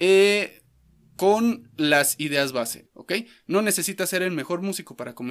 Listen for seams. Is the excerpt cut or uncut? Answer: cut